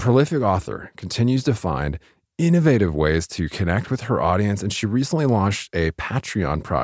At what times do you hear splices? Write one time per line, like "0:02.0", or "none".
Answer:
none